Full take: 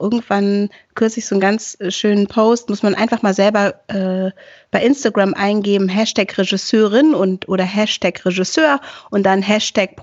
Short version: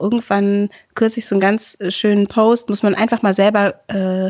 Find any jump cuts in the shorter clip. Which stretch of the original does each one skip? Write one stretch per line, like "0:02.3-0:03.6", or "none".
none